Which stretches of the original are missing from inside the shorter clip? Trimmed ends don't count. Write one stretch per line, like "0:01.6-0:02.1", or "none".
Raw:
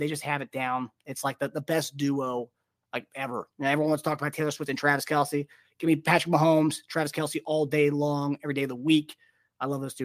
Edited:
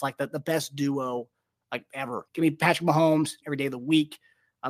0:03.5-0:05.7
0:06.9-0:08.4